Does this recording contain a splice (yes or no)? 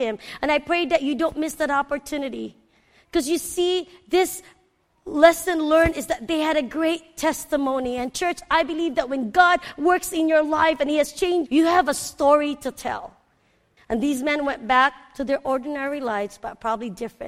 yes